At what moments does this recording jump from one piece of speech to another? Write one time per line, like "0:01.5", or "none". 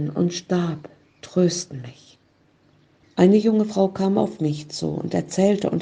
0:03.0